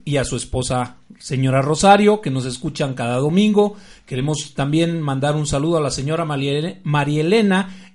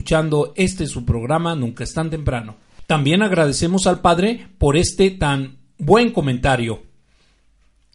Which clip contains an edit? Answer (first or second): second